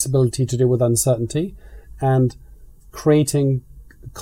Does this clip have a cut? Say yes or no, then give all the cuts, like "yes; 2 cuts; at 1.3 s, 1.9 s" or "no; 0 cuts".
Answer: no; 0 cuts